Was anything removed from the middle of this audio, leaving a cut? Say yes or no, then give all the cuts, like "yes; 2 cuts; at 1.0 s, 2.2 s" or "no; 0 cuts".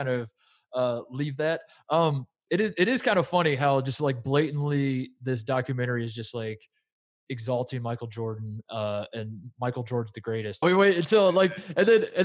yes; 1 cut; at 10.6 s